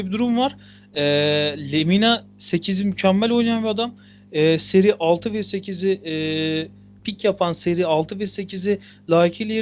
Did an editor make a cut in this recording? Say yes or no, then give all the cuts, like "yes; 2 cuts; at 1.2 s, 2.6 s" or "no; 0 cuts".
yes; 1 cut; at 7.0 s